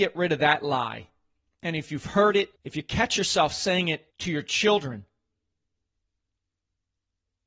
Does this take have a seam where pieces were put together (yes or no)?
yes